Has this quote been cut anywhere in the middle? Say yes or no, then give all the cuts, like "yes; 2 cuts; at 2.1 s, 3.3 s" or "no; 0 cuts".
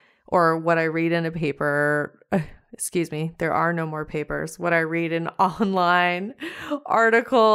no; 0 cuts